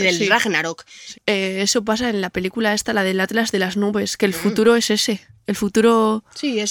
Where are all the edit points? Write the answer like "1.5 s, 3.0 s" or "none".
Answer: 1.1 s